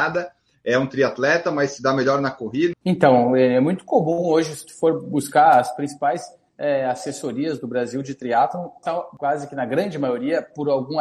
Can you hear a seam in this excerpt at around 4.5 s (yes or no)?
no